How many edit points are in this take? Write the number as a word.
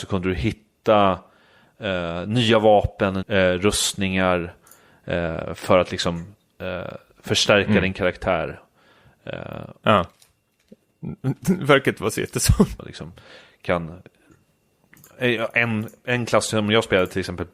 three